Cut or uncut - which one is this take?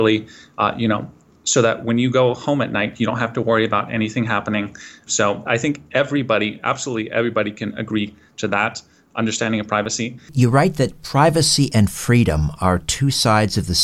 cut